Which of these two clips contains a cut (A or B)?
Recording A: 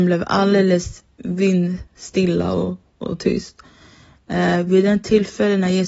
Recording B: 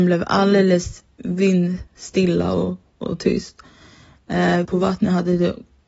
B